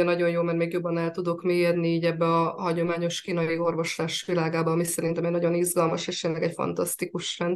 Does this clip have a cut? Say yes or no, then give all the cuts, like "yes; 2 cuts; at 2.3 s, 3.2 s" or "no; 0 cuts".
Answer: no; 0 cuts